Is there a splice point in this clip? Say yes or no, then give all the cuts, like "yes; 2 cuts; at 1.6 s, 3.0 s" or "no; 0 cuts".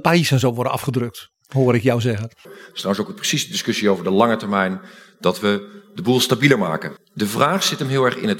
yes; 2 cuts; at 2.4 s, 7.0 s